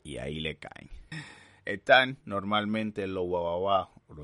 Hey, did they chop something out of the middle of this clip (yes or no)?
yes